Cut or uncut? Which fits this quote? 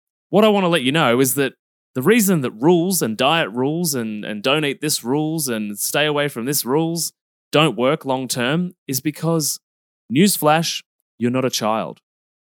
uncut